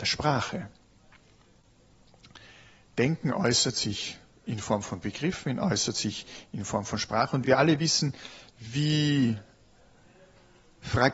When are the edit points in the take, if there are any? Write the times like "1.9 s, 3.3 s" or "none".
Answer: 7.4 s